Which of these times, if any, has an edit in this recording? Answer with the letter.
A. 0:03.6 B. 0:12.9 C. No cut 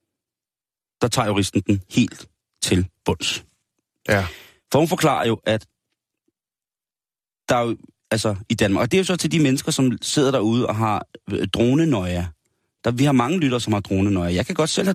C